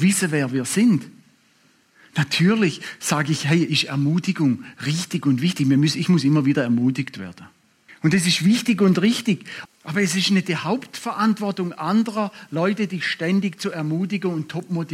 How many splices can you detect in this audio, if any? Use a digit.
2